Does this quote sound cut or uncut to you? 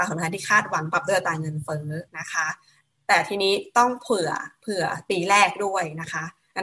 cut